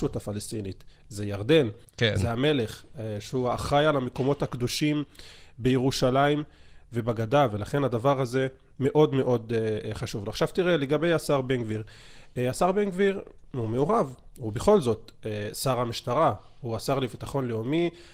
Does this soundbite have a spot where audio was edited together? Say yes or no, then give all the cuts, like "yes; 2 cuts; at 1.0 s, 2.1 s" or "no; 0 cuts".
no; 0 cuts